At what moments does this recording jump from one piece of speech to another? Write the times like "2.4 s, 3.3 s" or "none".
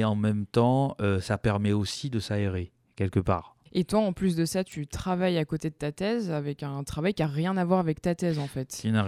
3.7 s